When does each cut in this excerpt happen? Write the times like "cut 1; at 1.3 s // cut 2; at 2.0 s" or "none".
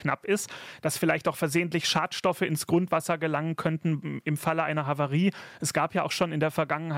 none